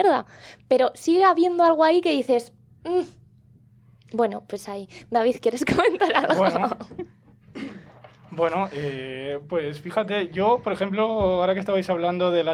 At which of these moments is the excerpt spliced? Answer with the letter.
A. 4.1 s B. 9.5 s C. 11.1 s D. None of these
D